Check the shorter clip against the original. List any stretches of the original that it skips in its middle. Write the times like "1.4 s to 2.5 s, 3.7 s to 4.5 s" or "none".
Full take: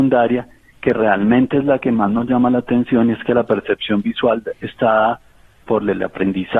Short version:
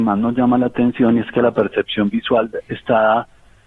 none